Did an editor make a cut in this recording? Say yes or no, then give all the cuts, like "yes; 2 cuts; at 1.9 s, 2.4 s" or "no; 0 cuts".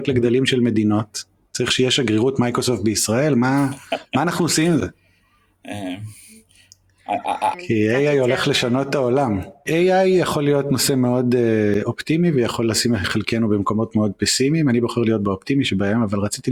yes; 1 cut; at 7.5 s